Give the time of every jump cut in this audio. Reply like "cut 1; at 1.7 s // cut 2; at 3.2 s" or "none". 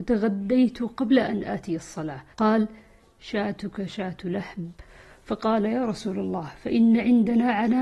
cut 1; at 2.3 s